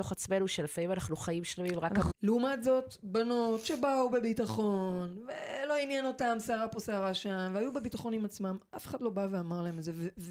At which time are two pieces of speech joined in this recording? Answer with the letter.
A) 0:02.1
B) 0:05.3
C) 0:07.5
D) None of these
A